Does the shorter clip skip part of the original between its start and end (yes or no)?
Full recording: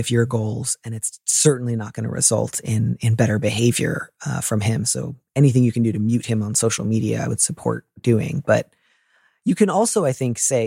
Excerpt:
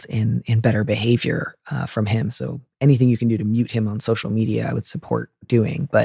no